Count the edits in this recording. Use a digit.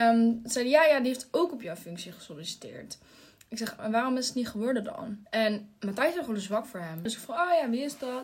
3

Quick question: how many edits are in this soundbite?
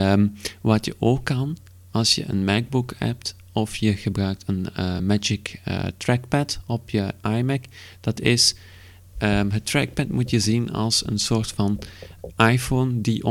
0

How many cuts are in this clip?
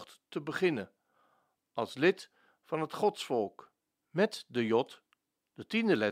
1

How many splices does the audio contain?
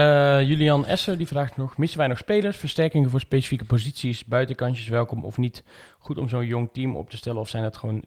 0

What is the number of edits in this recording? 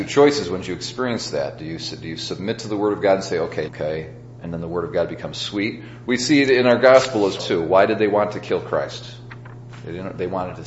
3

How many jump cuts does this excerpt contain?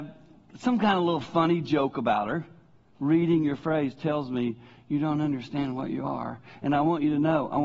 1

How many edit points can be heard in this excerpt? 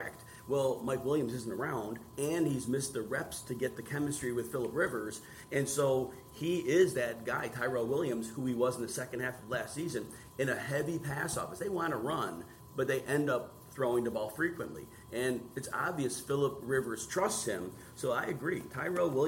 0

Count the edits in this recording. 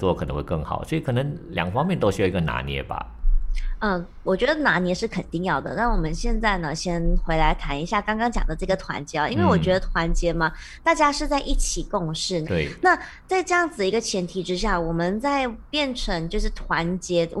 1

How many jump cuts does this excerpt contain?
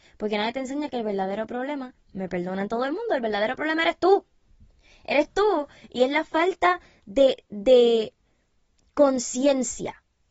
0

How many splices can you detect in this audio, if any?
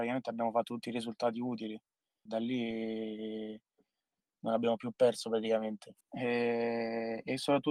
2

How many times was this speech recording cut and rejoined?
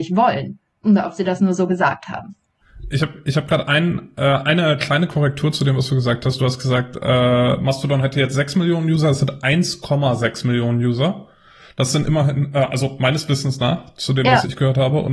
0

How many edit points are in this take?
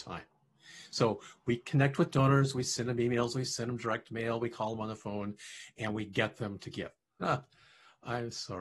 1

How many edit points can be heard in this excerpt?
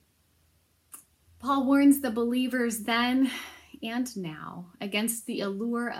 1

